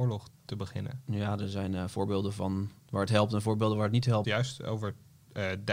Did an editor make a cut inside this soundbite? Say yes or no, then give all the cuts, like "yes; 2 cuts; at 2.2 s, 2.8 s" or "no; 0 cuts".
yes; 1 cut; at 4.2 s